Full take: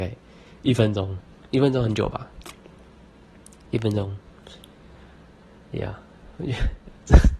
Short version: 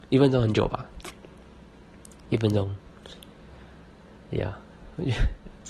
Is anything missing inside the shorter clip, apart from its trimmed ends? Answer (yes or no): no